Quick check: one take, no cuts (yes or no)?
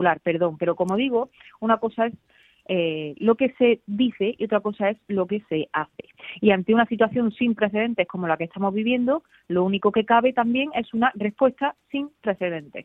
no